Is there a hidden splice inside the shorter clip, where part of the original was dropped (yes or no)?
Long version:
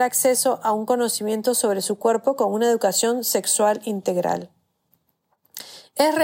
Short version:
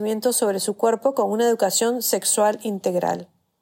no